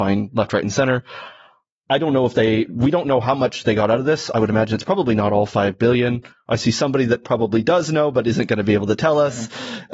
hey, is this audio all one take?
yes; 0 cuts

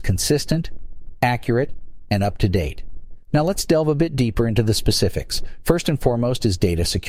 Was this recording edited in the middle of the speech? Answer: yes; 1 cut; at 3.3 s

